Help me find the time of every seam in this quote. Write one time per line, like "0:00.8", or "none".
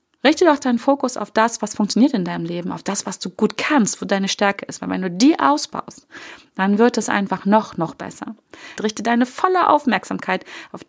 0:04.0
0:08.8